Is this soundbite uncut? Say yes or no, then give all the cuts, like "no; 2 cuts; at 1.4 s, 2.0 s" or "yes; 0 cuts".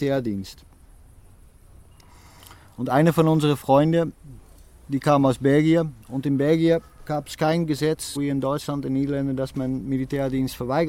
no; 2 cuts; at 6.0 s, 8.2 s